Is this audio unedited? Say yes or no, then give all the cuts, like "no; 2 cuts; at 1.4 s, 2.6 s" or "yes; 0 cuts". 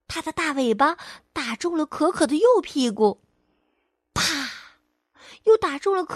yes; 0 cuts